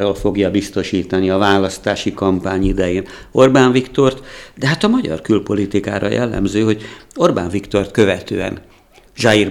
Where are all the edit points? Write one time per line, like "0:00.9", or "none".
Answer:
none